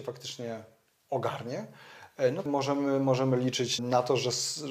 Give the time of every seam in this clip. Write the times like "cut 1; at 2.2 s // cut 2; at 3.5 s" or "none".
cut 1; at 2.5 s // cut 2; at 3.8 s